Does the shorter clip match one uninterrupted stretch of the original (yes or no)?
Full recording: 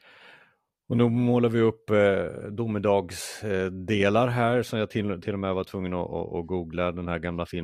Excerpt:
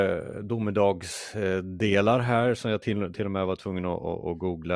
yes